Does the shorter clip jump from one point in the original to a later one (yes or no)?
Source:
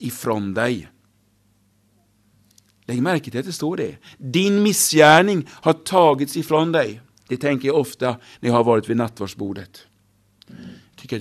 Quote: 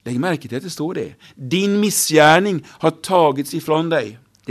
no